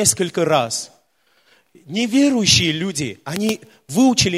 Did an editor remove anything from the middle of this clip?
no; 0 cuts

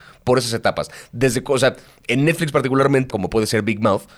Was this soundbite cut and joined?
yes; 1 cut; at 3.1 s

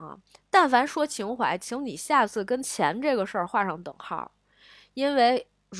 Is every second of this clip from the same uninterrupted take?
yes; 0 cuts

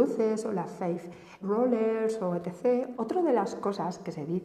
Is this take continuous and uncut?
no; 2 cuts; at 1.4 s, 2.9 s

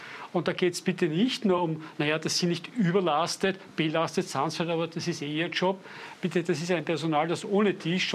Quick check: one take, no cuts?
yes; 0 cuts

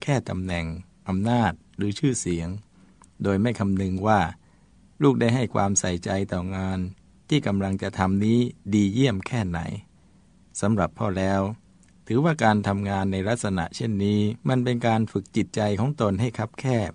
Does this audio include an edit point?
yes; 1 cut; at 14.4 s

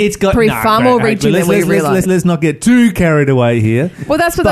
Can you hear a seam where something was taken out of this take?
yes; 1 cut; at 2.0 s

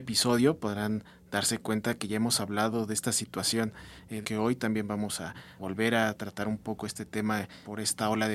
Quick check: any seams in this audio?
yes; 2 cuts; at 4.2 s, 5.6 s

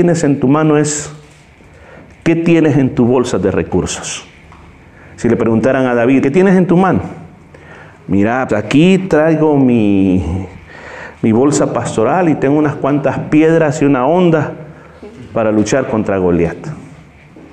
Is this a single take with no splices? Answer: no; 2 cuts; at 6.2 s, 8.5 s

